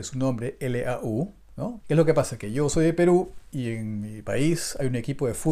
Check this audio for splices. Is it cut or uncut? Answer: cut